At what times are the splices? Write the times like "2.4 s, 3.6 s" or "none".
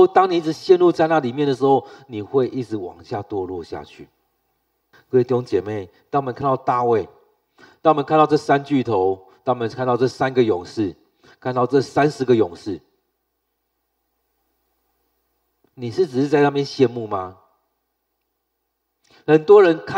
4.9 s